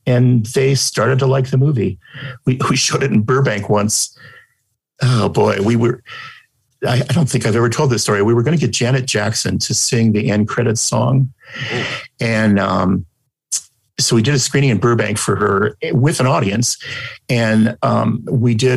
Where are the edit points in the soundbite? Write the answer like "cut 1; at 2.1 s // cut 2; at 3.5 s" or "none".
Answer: none